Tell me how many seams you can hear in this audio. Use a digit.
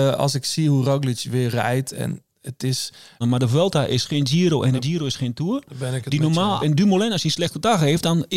2